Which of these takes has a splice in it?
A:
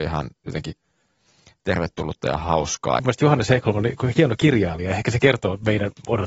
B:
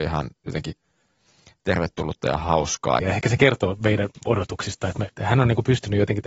B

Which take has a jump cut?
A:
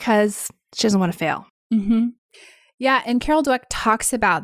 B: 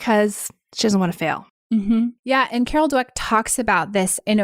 B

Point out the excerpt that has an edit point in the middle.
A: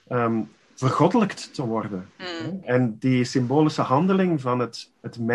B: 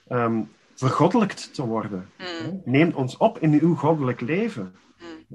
A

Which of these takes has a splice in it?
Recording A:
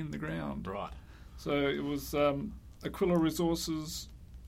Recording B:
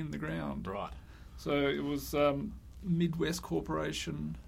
B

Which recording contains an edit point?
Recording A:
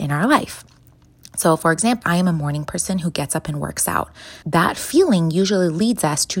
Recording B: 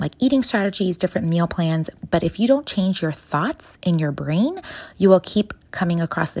A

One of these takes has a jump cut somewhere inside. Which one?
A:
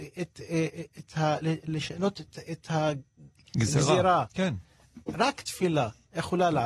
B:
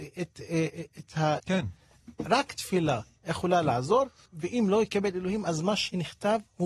B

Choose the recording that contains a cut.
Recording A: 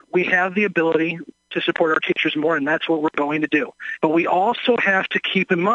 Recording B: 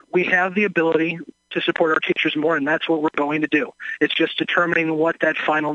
A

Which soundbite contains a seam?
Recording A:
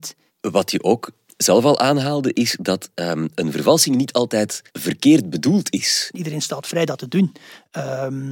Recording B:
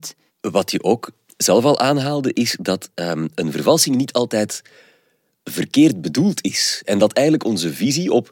A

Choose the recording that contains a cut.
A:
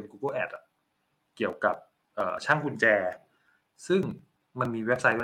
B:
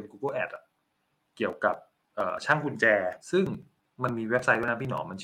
B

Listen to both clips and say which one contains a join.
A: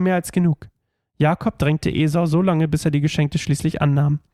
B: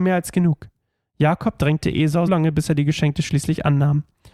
B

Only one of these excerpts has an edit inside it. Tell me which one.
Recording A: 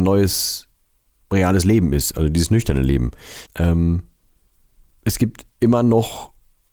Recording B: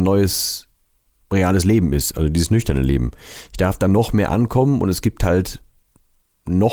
A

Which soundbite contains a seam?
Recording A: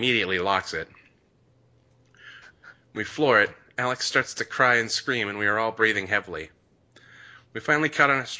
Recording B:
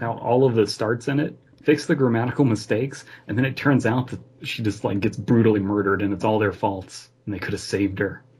A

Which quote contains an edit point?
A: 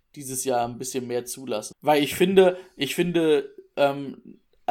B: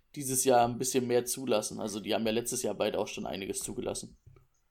A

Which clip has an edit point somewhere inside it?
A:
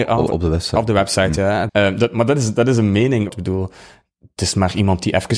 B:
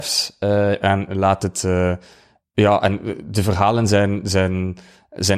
A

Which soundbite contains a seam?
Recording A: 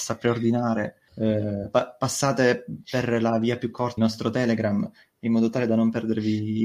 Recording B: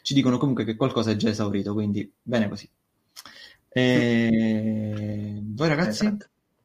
A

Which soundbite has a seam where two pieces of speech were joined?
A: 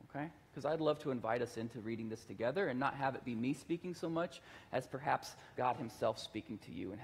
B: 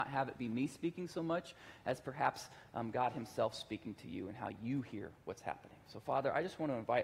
A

